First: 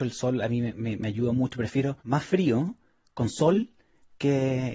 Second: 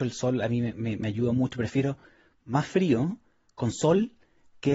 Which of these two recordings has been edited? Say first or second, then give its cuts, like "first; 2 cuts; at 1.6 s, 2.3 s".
first; 1 cut; at 2.0 s